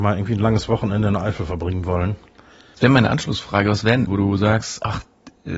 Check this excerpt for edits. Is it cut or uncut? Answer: cut